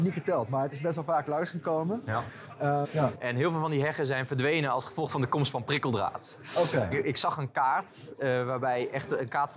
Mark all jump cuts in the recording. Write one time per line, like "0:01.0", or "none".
0:02.8
0:06.9